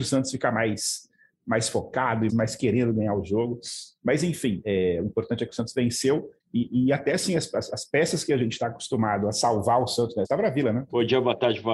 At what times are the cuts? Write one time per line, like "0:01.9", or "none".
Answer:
0:02.3
0:06.4
0:10.2